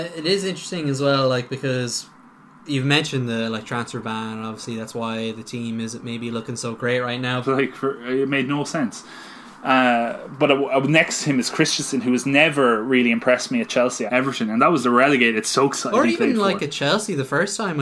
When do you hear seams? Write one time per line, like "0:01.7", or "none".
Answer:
0:07.4
0:14.1